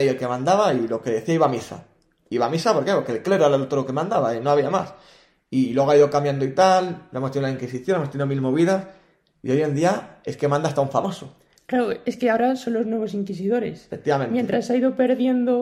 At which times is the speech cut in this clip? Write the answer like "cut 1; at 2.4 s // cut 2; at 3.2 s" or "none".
none